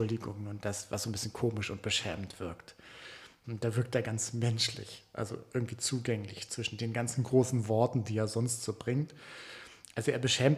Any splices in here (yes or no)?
yes